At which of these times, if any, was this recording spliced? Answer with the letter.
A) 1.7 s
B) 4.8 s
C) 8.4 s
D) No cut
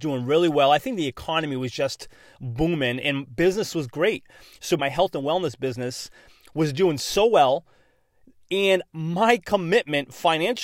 B